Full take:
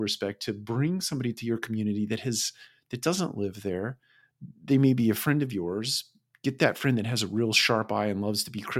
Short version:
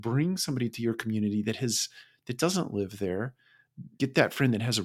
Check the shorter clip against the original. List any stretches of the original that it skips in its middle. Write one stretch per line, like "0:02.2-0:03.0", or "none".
0:04.6-0:06.4